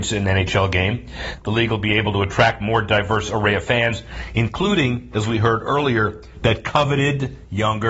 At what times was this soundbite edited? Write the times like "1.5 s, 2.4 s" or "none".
none